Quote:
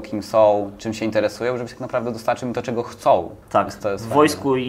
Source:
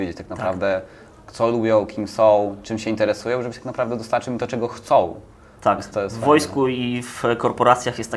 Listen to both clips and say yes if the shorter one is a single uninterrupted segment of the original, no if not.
no